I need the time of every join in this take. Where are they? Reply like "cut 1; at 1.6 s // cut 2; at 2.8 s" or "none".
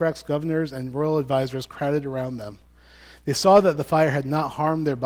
none